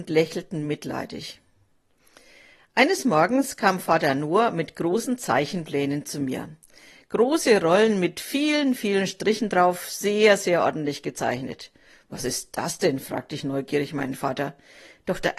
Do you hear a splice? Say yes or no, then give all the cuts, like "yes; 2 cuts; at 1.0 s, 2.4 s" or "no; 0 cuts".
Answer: no; 0 cuts